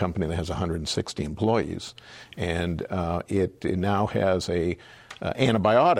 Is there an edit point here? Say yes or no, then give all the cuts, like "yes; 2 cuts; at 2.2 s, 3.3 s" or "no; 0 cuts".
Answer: no; 0 cuts